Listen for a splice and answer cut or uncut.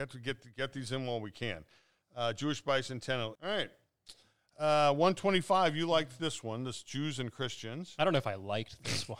cut